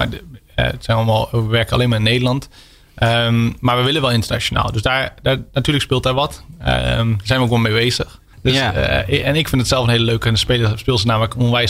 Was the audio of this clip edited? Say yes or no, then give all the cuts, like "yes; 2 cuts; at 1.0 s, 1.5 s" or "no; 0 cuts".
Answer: yes; 1 cut; at 8.3 s